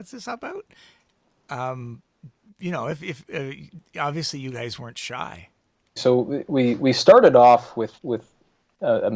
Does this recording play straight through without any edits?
no; 2 cuts; at 6.0 s, 8.0 s

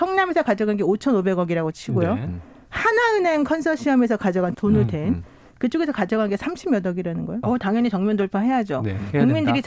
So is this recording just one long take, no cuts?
no; 2 cuts; at 4.5 s, 7.4 s

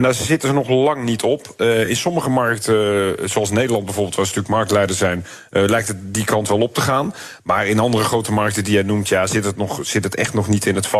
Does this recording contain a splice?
no; 0 cuts

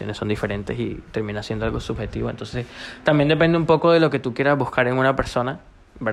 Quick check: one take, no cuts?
yes; 0 cuts

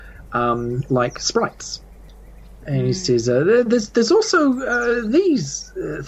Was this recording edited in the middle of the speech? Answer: no; 0 cuts

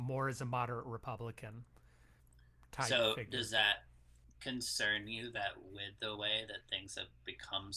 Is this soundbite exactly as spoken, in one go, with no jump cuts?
yes; 0 cuts

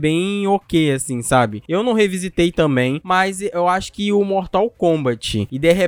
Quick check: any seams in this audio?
no; 0 cuts

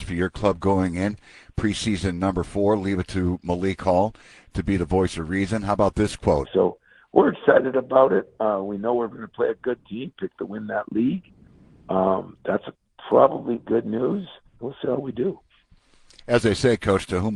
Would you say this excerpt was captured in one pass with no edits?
no; 2 cuts; at 6.4 s, 14.5 s

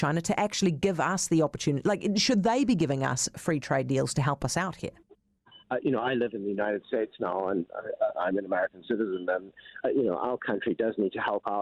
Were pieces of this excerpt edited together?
yes; 2 cuts; at 5.6 s, 9.8 s

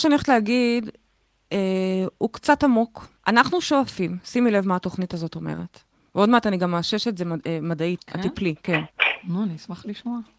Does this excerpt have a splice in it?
yes; 2 cuts; at 3.2 s, 8.0 s

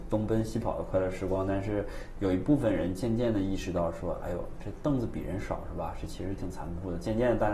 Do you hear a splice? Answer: no; 0 cuts

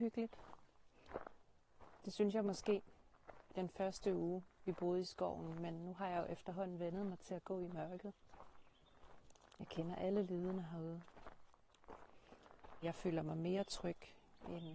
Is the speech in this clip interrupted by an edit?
yes; 1 cut; at 12.8 s

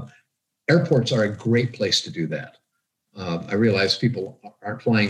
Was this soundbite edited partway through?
no; 0 cuts

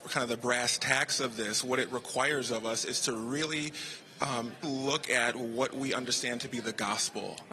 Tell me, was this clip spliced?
yes; 1 cut; at 4.6 s

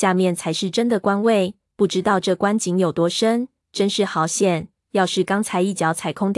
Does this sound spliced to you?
no; 0 cuts

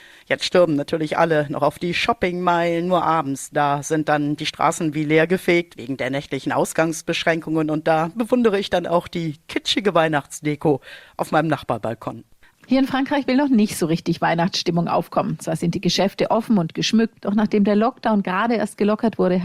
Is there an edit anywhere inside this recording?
yes; 1 cut; at 17.2 s

